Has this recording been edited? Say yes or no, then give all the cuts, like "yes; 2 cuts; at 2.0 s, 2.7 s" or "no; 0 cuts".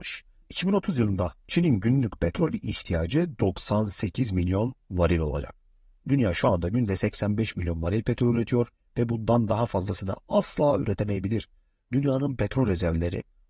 no; 0 cuts